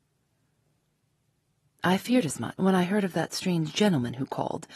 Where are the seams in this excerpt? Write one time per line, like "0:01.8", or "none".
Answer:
0:02.6